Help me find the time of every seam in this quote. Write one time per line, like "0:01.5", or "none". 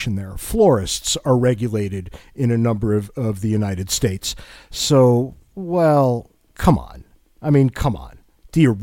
none